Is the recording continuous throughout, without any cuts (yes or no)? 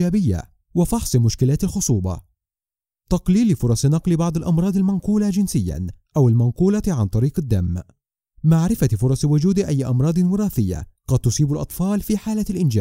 yes